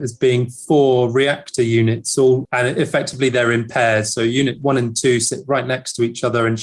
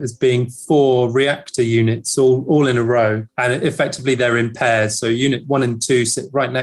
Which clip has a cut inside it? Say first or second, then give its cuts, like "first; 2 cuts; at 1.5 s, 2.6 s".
first; 1 cut; at 2.4 s